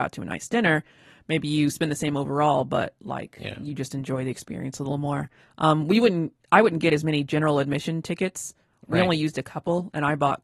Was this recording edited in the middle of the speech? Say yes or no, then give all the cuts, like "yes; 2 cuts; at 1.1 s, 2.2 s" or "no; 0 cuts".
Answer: no; 0 cuts